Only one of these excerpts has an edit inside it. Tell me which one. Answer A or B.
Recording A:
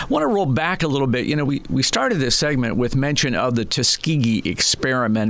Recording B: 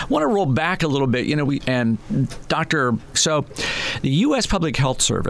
B